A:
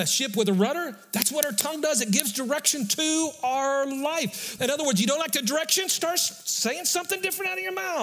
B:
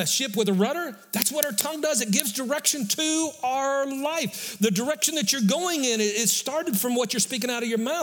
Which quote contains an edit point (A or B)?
A